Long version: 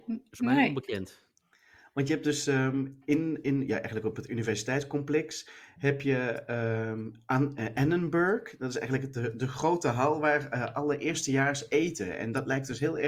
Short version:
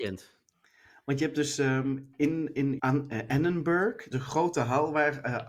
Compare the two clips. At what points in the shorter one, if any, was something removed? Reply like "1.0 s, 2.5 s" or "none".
2.8 s, 4.1 s

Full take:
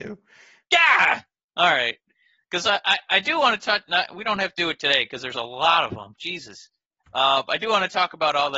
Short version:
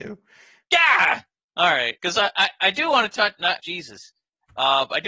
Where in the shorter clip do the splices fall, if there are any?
2.0 s, 3.6 s

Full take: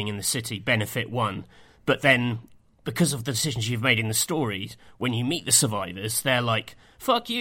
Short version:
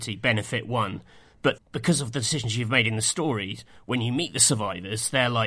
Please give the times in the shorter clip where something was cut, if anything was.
1.6 s

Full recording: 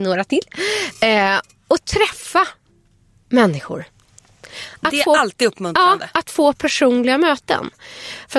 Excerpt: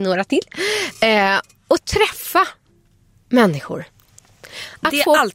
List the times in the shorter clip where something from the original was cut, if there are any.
none

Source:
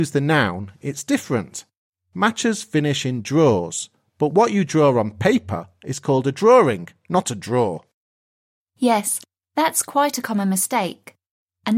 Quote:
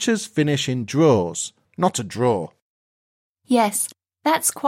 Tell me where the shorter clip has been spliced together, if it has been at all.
1.6 s

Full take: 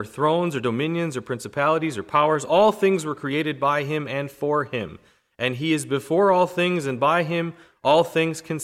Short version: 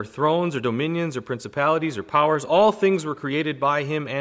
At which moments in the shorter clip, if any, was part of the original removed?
none

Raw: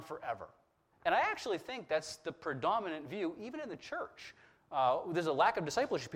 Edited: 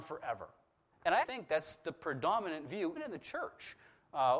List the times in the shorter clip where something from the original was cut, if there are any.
1.2 s, 2.9 s

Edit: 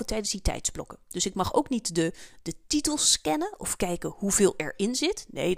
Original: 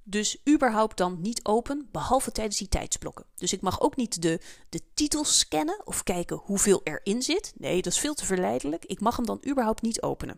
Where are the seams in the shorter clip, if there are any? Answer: none

